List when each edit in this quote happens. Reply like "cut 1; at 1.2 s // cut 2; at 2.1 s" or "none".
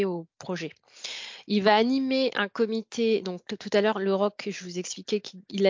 none